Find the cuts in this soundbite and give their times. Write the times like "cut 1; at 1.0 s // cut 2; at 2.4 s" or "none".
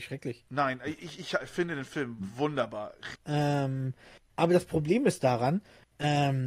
cut 1; at 3.1 s